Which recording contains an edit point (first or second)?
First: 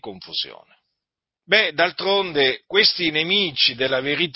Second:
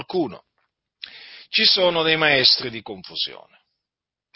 first